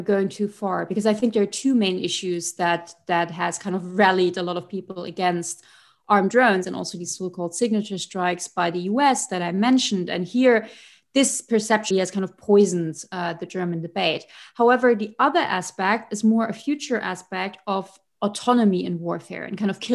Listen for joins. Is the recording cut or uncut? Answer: cut